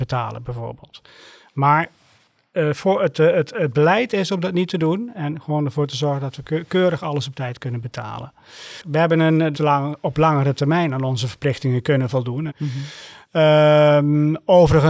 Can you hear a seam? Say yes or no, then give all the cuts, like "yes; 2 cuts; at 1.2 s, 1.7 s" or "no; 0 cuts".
yes; 2 cuts; at 9.5 s, 12.5 s